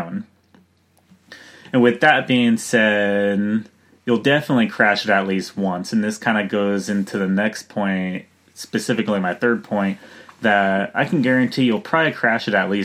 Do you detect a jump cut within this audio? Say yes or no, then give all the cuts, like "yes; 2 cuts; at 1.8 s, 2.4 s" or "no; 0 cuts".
no; 0 cuts